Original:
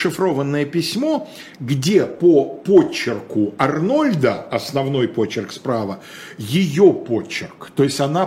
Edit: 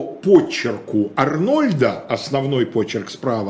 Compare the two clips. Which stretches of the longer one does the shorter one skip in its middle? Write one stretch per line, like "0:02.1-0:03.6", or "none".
none